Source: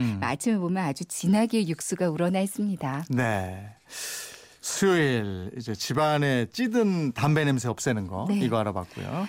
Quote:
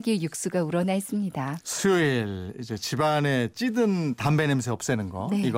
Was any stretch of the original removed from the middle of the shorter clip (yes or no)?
yes